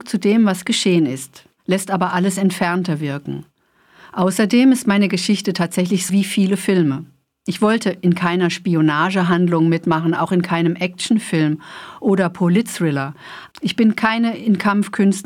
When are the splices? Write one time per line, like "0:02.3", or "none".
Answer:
0:06.1
0:13.5